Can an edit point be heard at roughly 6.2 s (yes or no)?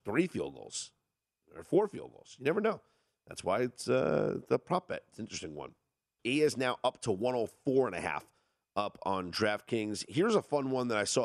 yes